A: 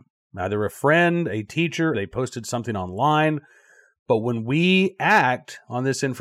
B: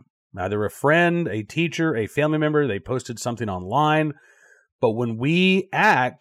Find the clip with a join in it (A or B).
A